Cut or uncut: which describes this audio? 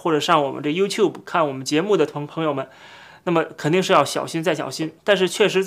uncut